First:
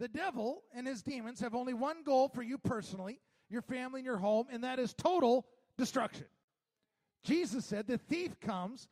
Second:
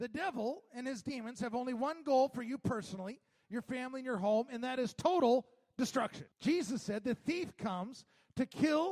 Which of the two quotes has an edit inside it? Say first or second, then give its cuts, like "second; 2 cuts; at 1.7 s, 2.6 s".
second; 1 cut; at 6.3 s